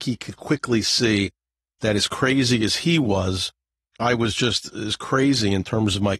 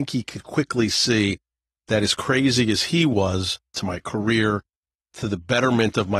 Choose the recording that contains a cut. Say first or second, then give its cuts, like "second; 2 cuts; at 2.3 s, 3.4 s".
second; 1 cut; at 3.7 s